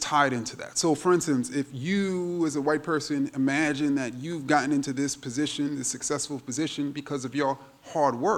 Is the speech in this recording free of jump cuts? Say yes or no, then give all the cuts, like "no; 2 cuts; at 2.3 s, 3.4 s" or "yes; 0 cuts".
yes; 0 cuts